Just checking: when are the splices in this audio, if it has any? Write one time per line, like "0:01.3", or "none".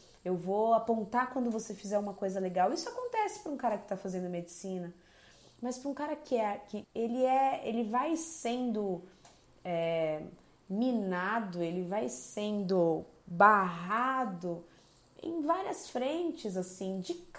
0:06.8